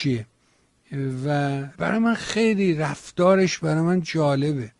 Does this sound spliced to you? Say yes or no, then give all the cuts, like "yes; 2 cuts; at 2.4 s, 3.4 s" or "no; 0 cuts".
yes; 1 cut; at 1.7 s